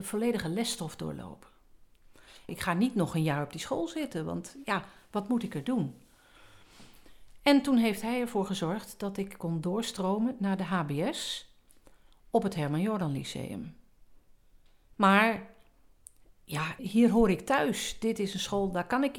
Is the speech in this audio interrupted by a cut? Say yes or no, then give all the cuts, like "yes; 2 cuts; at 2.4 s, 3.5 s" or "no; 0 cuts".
yes; 3 cuts; at 2.5 s, 14.9 s, 16.8 s